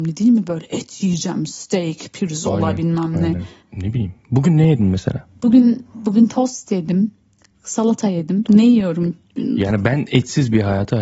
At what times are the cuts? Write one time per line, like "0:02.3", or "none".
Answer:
0:03.6
0:08.4